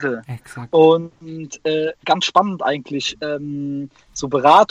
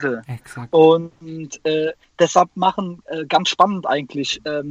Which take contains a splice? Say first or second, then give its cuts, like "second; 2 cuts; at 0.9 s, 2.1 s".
first; 1 cut; at 2.0 s